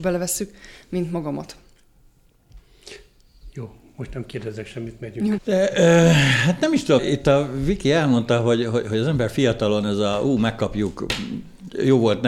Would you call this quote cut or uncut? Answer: cut